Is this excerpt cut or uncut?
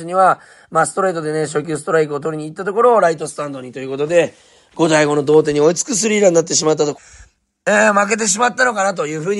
cut